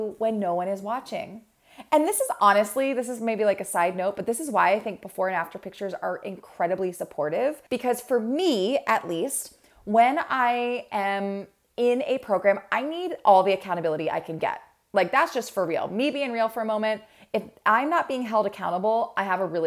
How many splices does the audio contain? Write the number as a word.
one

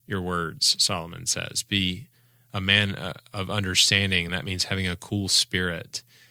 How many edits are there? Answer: zero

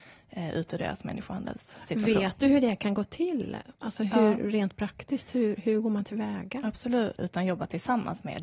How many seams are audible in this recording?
one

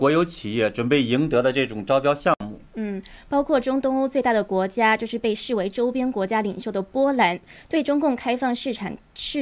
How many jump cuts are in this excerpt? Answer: one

